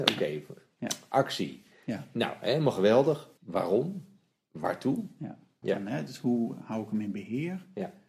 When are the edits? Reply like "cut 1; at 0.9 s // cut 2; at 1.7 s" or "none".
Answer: cut 1; at 3.4 s // cut 2; at 5.6 s